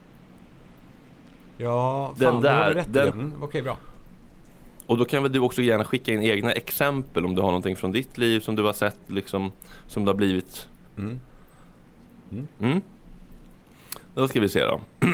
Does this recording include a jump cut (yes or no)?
yes